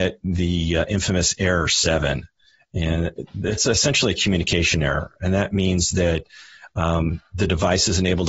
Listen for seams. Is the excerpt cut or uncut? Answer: uncut